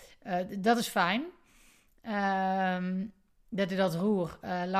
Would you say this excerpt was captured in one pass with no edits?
yes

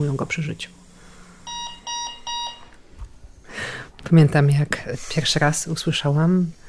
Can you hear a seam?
no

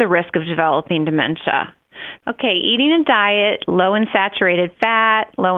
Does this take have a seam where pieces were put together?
yes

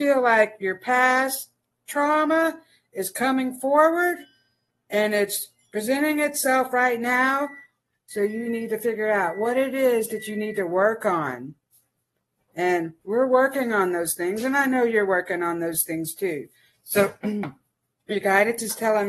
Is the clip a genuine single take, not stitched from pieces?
yes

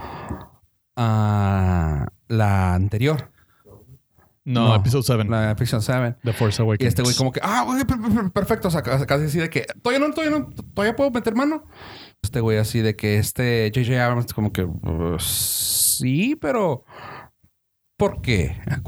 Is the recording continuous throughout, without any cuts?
no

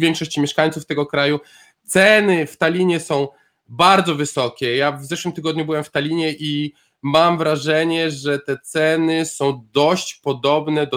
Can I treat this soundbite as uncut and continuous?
yes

